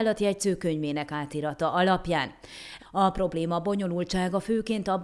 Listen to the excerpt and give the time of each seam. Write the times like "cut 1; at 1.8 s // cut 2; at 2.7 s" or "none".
cut 1; at 2.8 s